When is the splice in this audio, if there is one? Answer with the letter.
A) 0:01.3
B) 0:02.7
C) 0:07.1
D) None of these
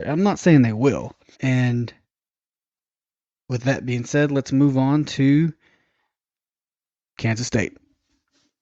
A